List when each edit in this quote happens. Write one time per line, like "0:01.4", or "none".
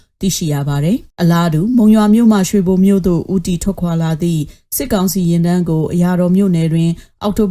0:01.1